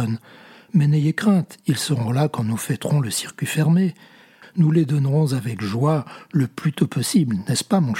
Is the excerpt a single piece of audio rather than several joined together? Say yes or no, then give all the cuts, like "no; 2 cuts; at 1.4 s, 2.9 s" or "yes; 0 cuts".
no; 1 cut; at 4.4 s